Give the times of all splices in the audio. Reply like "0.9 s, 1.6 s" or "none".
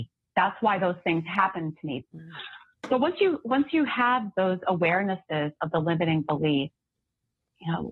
2.0 s